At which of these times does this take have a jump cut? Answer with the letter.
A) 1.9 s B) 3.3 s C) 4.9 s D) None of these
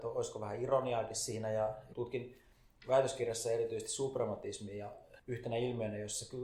A